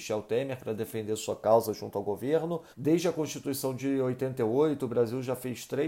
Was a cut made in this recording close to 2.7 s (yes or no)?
yes